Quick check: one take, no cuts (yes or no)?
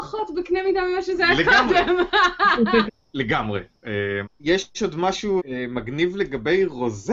no